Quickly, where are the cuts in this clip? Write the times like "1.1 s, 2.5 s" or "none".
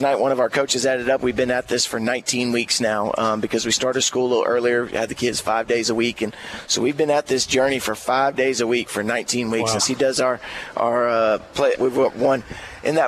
9.8 s, 11.7 s